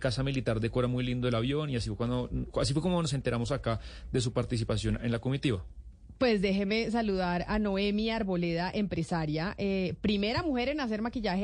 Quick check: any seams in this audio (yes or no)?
no